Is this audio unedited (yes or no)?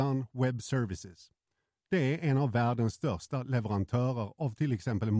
yes